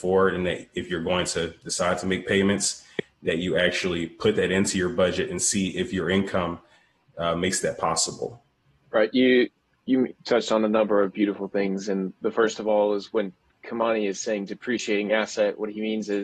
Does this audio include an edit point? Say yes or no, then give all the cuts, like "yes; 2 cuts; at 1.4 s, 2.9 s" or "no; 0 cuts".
no; 0 cuts